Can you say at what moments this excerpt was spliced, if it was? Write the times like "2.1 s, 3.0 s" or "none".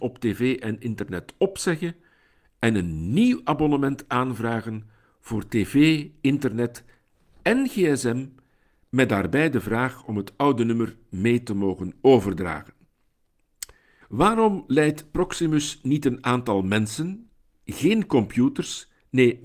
14.0 s